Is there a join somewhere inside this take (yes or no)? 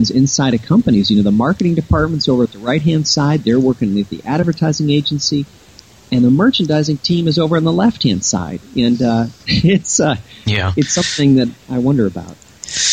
no